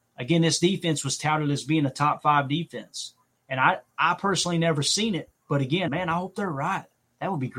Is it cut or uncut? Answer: cut